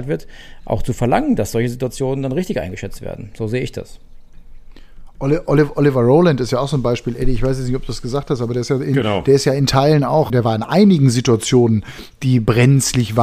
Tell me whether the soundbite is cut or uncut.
cut